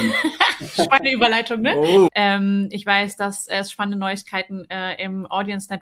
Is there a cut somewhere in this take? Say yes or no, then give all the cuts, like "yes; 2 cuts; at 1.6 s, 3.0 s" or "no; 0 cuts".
yes; 1 cut; at 2.1 s